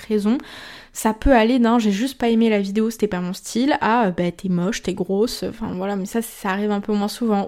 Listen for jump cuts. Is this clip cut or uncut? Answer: uncut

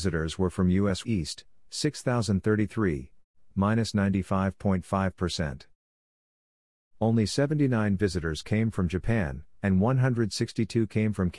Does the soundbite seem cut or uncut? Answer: cut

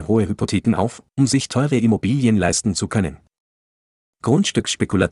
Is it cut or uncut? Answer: uncut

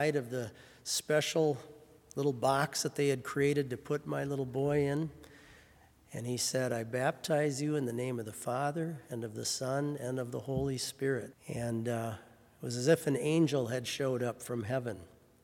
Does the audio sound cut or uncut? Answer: cut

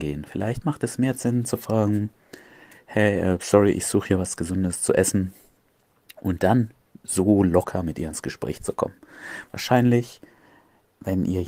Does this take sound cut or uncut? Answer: uncut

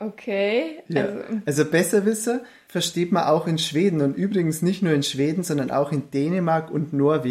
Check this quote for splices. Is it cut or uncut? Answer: uncut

